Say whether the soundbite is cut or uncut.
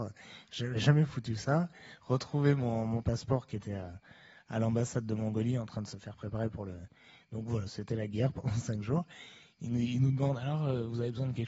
uncut